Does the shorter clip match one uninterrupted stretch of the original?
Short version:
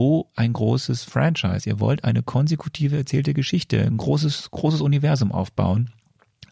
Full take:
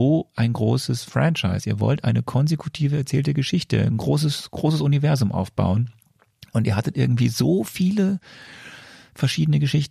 yes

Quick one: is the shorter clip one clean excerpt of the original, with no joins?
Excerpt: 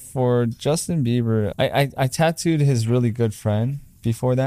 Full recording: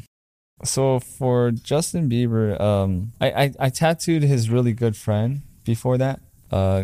no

